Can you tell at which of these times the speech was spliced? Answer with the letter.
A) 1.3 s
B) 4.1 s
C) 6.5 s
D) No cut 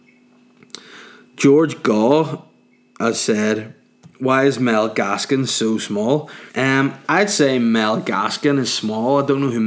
C